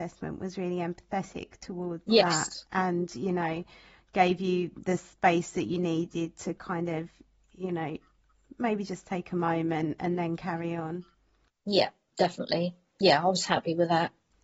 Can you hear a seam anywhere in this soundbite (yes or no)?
no